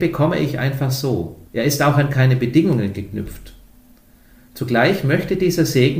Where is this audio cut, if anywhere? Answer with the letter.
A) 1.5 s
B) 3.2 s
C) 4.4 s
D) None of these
A